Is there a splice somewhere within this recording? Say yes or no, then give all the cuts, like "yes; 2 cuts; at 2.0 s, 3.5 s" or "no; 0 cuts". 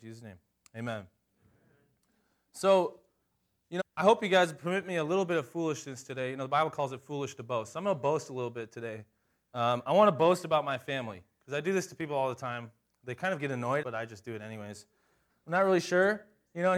yes; 3 cuts; at 3.8 s, 13.8 s, 15.3 s